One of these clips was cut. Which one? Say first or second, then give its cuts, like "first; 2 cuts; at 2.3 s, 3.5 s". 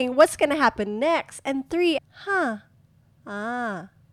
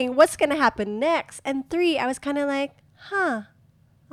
first; 1 cut; at 2.0 s